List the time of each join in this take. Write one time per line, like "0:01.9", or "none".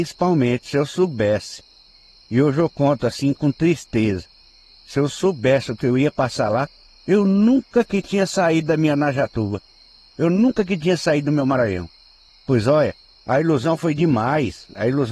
none